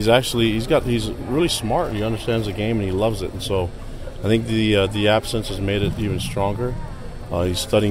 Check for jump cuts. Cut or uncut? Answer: uncut